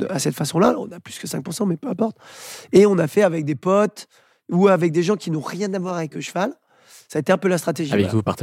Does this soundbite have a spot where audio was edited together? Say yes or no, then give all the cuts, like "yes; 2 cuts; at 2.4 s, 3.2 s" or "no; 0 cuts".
no; 0 cuts